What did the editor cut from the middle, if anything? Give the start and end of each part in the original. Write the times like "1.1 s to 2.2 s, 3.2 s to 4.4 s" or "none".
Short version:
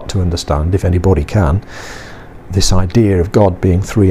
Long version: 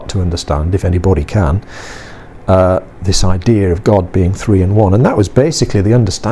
2.4 s to 2.9 s